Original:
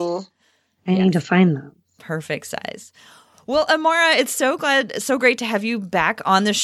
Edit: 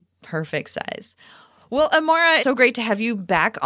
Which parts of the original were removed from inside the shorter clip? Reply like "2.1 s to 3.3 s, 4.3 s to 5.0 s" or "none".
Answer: 4.2 s to 5.0 s